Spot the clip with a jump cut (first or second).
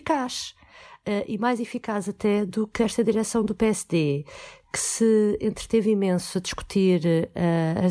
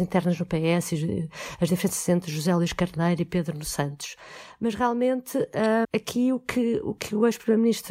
second